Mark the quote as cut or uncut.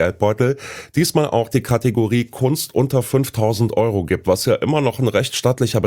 uncut